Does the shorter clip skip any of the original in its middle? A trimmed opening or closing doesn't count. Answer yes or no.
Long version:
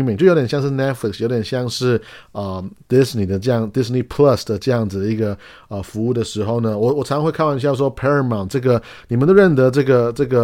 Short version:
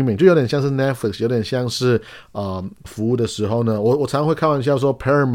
yes